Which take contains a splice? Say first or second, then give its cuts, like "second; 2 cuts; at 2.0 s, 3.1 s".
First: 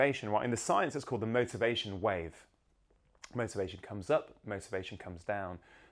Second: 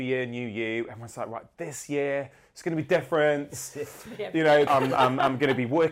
second; 1 cut; at 4.7 s